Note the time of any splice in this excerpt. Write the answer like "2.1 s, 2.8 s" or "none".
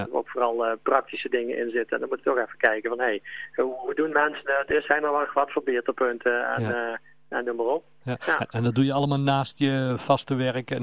none